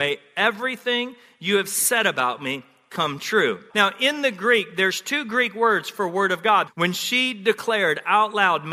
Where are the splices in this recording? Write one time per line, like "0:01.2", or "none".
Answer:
0:03.7
0:06.7